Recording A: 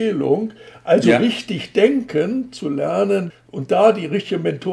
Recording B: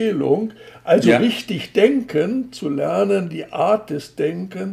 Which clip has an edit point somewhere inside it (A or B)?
A